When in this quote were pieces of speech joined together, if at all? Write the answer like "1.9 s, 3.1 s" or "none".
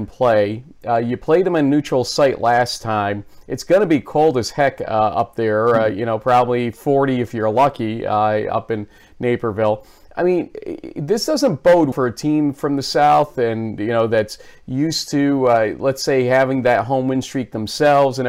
11.9 s